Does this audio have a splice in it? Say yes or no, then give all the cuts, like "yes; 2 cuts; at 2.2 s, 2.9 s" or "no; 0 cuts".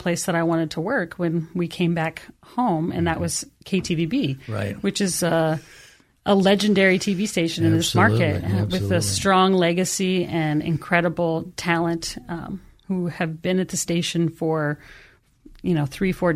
no; 0 cuts